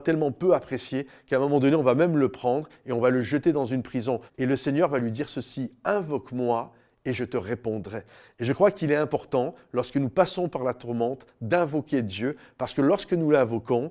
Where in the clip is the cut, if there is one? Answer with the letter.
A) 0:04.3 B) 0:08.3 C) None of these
A